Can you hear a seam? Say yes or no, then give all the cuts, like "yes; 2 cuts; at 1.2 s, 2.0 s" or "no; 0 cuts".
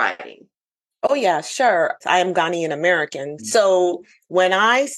yes; 2 cuts; at 2.0 s, 3.4 s